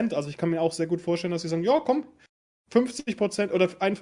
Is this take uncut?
yes; 0 cuts

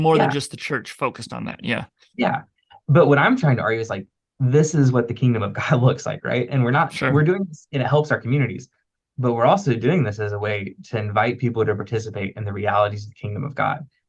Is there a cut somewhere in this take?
no; 0 cuts

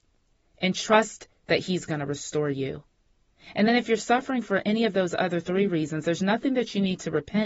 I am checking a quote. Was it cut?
no; 0 cuts

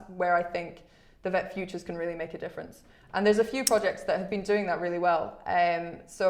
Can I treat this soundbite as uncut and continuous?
yes; 0 cuts

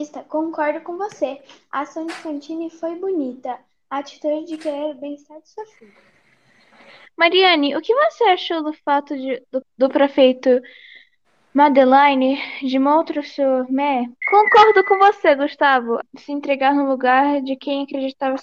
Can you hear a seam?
yes; 3 cuts; at 9.6 s, 14.2 s, 16.0 s

